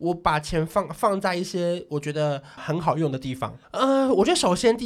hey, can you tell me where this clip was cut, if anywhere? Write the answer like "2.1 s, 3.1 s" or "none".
2.6 s, 3.6 s